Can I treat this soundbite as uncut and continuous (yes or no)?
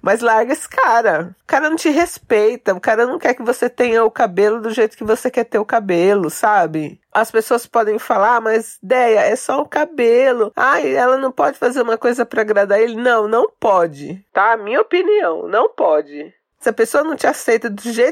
yes